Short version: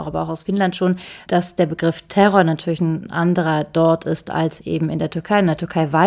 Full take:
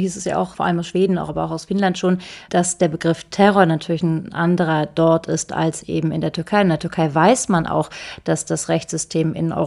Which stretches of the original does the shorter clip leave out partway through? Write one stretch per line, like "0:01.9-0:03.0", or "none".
none